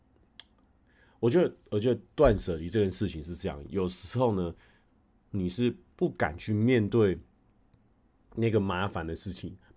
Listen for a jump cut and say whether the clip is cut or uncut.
uncut